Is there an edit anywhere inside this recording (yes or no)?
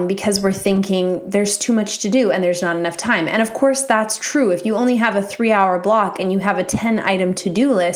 no